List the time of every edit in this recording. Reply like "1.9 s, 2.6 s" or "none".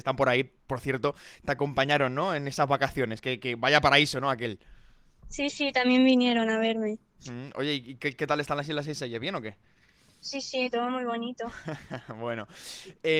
none